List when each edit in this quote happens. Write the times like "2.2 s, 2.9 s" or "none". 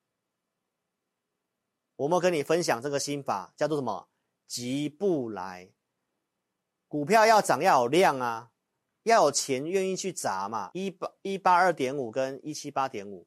10.7 s